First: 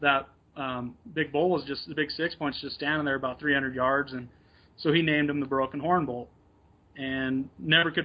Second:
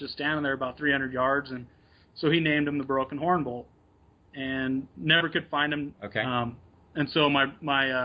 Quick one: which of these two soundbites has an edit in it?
second; 1 cut; at 5.9 s

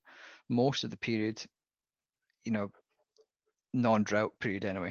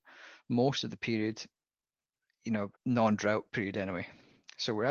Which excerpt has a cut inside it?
second; 1 cut; at 2.8 s

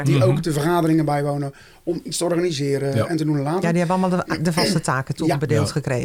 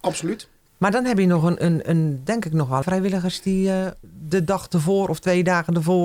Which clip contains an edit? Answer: second; 1 cut; at 2.8 s

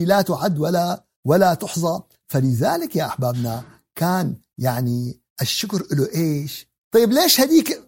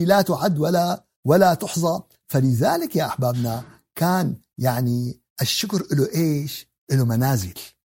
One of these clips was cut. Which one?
first; 1 cut; at 6.8 s

